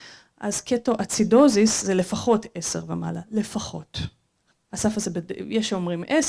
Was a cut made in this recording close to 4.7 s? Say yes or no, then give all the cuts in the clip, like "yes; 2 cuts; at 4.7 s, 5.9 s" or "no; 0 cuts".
yes; 1 cut; at 4.7 s